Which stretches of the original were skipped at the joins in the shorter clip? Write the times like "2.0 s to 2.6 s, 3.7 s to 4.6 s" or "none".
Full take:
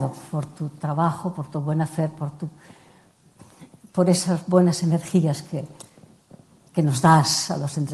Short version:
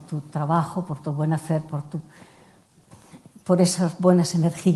none